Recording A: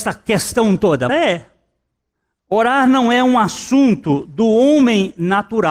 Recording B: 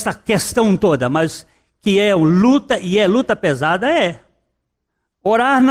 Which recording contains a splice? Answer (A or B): A